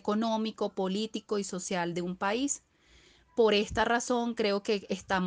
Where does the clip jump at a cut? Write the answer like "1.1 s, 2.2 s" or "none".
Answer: none